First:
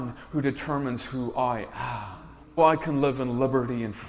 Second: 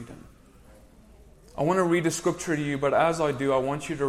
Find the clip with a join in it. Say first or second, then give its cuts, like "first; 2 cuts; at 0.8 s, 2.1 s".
first; 1 cut; at 2.6 s